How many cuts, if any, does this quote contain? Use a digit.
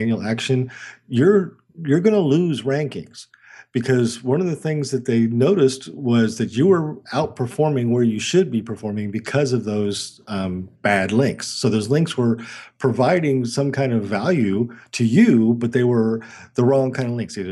1